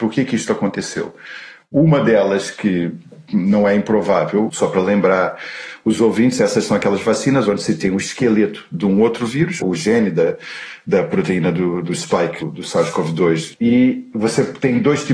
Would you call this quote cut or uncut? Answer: cut